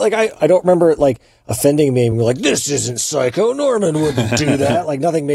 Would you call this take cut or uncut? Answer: uncut